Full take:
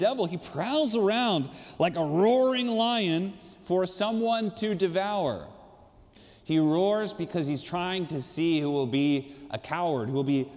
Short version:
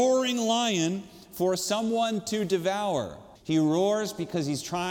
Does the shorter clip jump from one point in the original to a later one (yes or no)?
yes